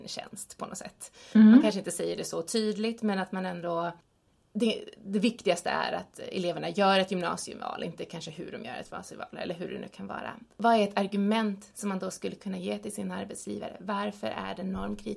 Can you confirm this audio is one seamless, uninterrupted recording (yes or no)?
yes